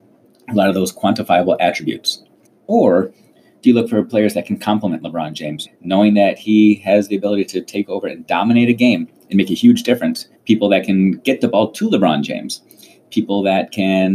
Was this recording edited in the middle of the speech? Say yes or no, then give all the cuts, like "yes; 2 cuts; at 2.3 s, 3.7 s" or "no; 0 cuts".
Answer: yes; 3 cuts; at 2.5 s, 5.7 s, 10.3 s